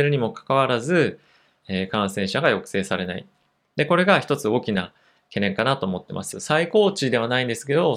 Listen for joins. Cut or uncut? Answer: cut